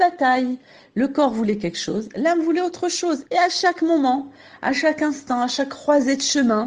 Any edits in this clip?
yes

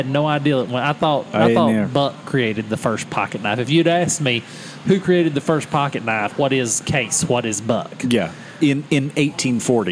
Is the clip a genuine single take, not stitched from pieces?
no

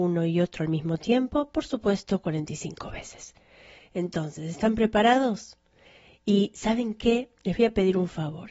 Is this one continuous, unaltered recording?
yes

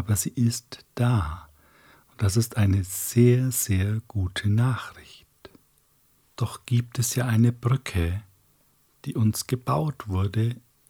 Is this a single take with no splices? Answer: no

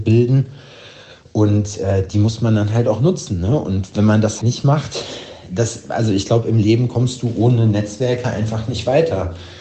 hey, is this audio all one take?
no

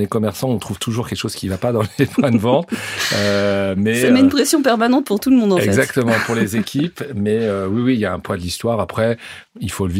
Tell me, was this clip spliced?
no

